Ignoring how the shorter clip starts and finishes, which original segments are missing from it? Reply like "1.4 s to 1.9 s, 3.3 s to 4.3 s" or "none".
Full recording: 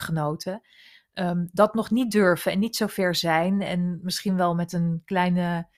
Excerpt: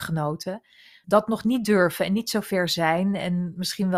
1.0 s to 1.5 s